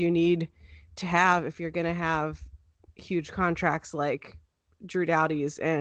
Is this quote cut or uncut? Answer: uncut